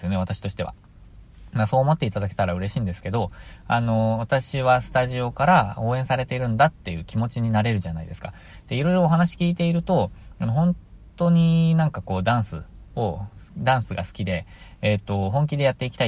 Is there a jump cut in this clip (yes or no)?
no